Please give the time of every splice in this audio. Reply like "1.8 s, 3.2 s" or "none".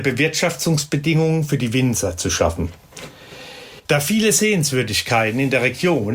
3.8 s